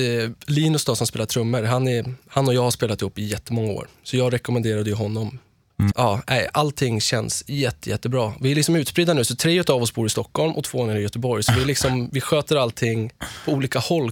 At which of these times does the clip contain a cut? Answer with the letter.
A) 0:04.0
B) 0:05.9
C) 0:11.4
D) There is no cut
B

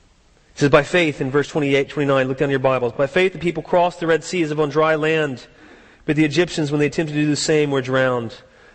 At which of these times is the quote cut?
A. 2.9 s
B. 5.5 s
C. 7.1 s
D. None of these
D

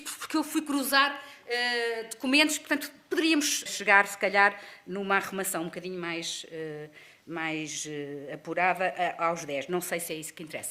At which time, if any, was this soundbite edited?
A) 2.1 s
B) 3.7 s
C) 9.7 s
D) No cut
B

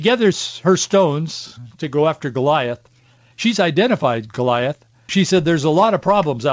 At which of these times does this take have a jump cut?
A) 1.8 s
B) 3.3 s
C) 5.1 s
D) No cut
C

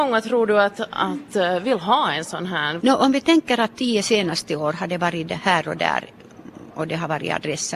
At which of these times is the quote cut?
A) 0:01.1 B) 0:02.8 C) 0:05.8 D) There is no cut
B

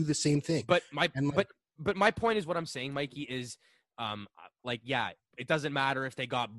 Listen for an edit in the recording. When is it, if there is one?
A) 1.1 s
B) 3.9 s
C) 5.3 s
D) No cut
C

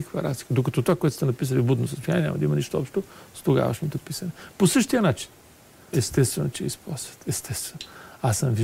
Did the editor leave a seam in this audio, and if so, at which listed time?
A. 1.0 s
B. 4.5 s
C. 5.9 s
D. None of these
C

